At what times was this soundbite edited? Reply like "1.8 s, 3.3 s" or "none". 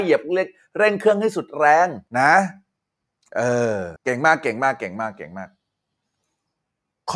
2.1 s, 4.0 s